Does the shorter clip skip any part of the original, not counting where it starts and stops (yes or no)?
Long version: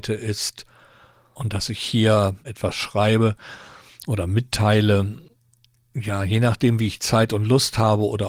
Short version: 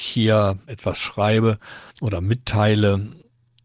yes